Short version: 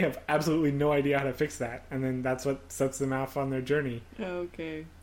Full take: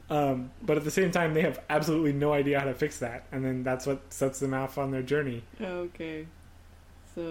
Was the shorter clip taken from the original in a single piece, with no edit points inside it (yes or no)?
yes